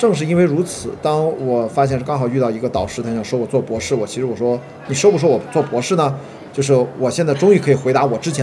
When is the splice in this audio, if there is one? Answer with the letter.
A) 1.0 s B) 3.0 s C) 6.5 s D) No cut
C